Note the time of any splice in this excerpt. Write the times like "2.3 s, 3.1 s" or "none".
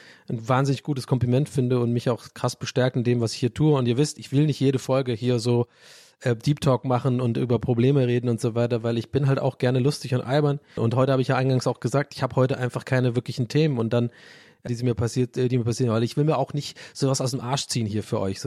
10.8 s, 14.7 s